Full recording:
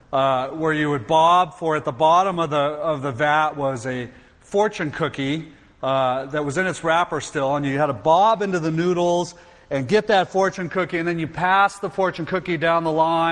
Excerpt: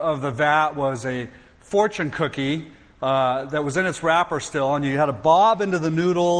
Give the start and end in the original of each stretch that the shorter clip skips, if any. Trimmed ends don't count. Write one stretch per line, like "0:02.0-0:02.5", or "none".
none